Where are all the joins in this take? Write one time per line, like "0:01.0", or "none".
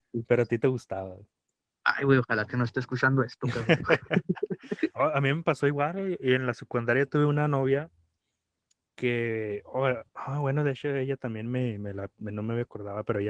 0:10.1